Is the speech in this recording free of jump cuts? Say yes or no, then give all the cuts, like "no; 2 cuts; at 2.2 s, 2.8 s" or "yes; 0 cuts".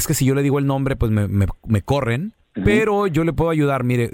yes; 0 cuts